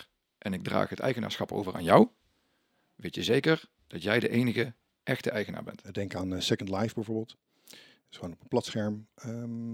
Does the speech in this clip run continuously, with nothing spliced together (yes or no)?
no